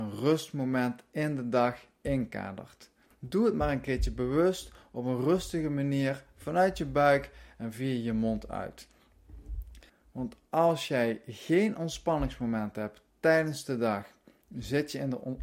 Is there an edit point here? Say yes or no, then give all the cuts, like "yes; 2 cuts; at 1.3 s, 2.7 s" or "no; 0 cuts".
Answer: yes; 2 cuts; at 3.1 s, 9.9 s